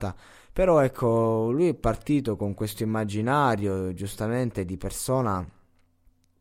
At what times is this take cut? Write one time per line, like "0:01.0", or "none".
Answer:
none